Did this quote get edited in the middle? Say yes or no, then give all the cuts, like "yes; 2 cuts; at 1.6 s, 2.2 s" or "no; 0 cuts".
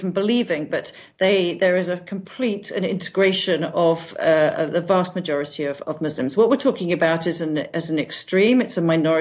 yes; 1 cut; at 5.8 s